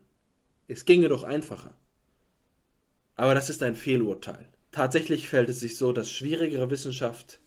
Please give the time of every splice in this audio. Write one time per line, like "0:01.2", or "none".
0:04.6